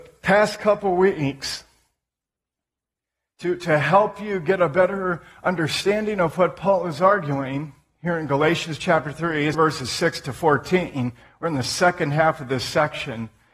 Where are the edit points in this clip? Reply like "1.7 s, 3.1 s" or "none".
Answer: 9.5 s

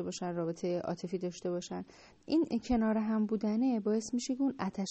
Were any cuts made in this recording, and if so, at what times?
none

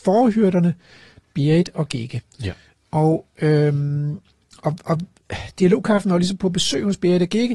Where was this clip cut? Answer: none

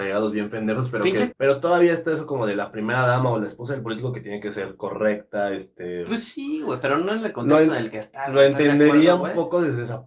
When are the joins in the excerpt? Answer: 1.3 s

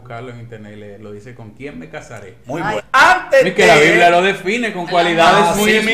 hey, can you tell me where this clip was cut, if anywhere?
2.8 s

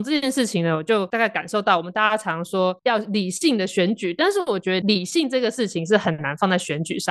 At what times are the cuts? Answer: none

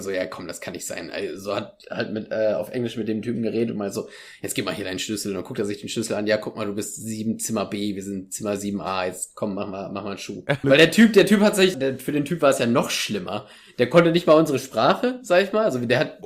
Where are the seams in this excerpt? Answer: 10.6 s, 11.7 s

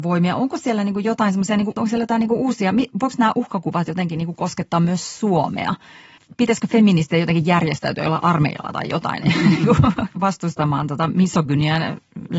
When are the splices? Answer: none

